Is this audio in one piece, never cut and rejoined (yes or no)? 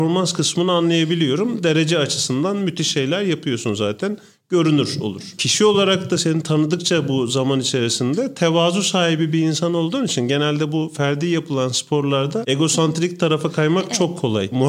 yes